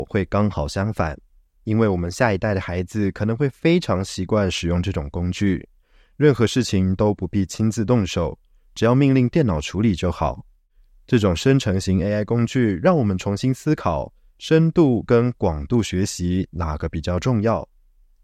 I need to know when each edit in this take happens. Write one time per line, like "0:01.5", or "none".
none